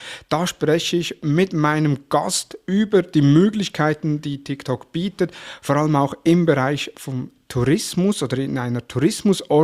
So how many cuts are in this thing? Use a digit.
0